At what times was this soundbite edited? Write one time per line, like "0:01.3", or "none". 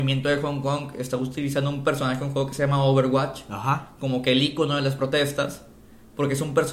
none